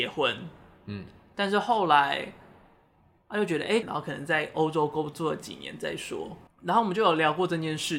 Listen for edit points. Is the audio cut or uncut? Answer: cut